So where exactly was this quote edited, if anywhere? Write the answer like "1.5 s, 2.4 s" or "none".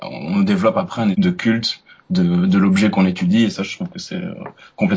1.1 s